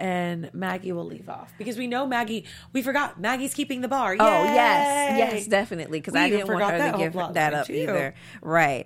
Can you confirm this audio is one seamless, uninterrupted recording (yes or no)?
yes